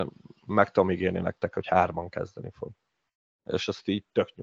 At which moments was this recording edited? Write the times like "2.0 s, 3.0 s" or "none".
none